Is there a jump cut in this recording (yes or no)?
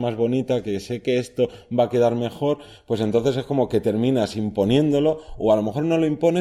no